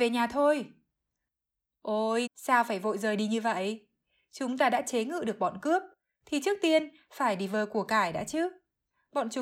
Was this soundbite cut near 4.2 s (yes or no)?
no